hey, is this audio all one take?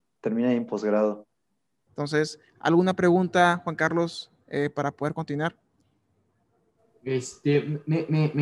no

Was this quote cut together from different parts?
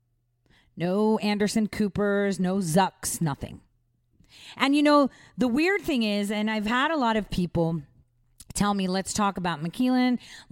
no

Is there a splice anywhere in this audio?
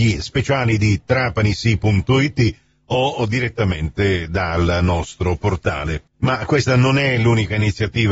no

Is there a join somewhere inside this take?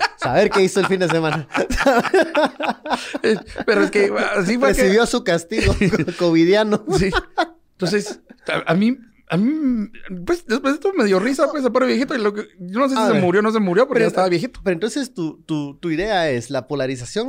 no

